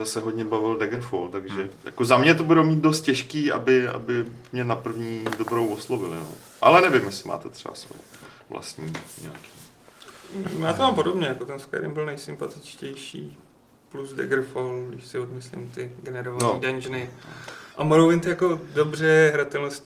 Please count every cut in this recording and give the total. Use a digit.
1